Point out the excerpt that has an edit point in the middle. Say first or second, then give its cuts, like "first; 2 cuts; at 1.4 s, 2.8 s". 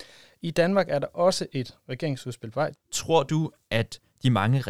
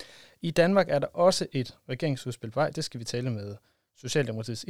first; 1 cut; at 2.7 s